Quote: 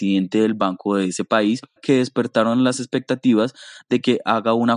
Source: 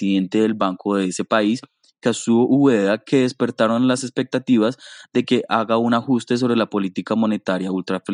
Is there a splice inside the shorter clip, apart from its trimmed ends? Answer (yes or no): yes